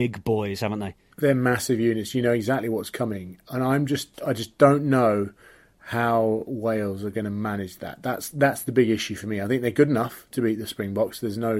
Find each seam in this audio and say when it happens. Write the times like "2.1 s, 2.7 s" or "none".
none